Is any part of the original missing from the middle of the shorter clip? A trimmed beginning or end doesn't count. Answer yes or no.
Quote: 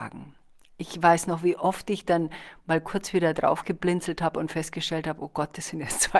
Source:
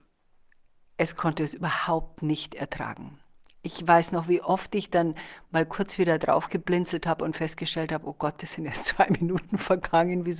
no